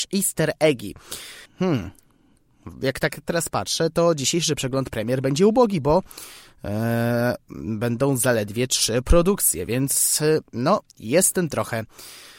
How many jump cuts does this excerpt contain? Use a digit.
1